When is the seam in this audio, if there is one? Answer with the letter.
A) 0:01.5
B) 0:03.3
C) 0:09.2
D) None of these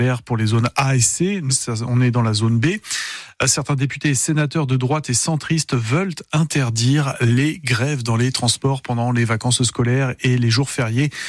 A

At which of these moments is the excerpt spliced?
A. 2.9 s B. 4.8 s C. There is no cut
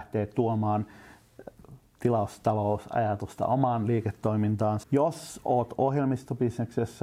B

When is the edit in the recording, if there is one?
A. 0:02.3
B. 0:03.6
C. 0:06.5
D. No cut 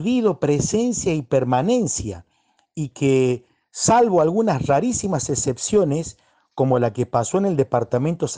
D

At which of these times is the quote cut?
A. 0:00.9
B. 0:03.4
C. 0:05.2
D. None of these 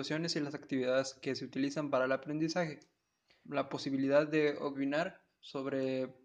B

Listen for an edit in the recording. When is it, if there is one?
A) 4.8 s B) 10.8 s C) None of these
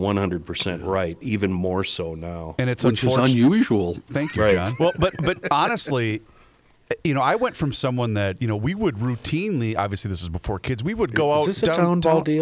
A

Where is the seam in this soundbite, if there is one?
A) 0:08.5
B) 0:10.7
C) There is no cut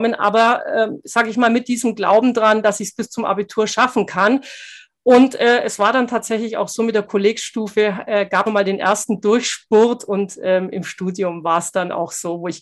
A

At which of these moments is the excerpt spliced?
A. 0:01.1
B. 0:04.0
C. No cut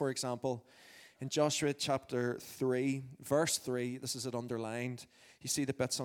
C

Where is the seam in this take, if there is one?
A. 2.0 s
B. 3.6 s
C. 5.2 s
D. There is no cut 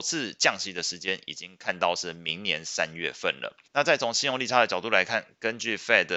B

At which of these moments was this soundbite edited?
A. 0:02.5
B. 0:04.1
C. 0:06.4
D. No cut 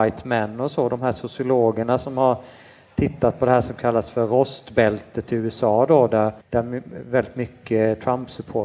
C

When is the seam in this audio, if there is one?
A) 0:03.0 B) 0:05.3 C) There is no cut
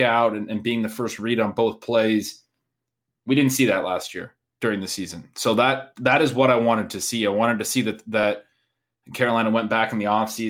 C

